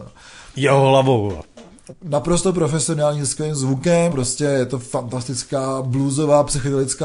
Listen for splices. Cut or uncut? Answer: cut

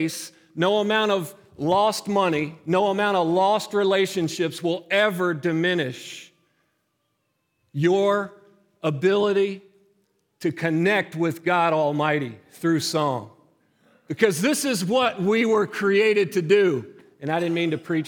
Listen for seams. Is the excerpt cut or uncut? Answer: uncut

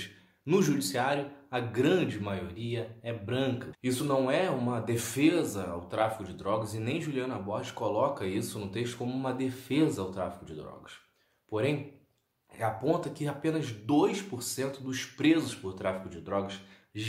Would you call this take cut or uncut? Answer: cut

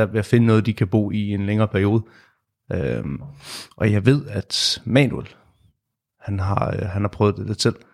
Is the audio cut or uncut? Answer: cut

